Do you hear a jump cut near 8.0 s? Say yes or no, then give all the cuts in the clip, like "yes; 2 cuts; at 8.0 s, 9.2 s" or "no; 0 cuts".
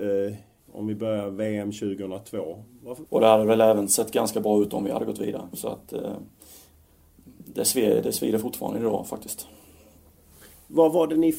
no; 1 cut; at 3.1 s